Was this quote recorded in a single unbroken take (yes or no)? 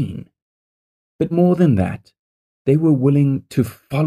no